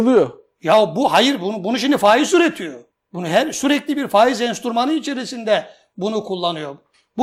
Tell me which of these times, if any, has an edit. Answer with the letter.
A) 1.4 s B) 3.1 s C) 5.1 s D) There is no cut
D